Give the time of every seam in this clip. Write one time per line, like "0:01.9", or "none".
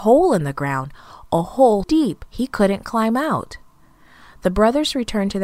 0:01.8

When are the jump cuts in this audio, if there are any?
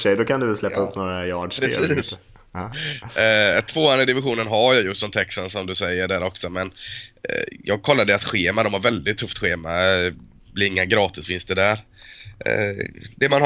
none

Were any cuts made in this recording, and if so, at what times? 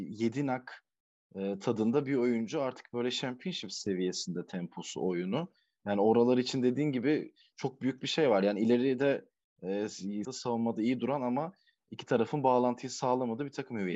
0:10.2

